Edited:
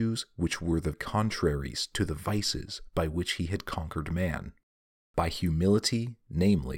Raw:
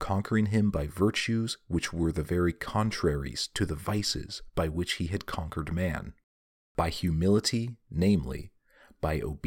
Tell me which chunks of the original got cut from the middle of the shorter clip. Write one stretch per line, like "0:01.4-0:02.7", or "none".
0:02.3-0:02.5